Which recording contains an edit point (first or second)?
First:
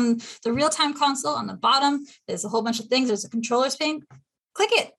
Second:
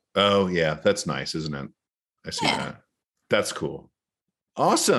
first